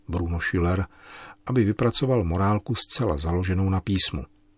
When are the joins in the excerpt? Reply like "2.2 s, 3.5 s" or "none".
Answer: none